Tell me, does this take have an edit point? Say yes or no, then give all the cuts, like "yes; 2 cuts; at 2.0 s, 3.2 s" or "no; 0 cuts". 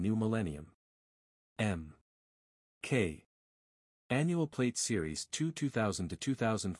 yes; 2 cuts; at 1.5 s, 3.9 s